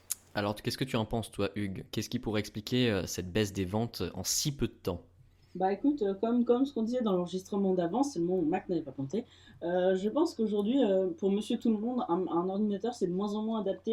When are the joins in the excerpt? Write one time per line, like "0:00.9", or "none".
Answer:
none